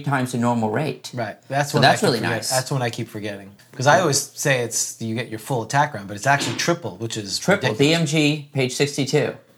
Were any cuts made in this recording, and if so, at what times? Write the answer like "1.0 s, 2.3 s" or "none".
3.6 s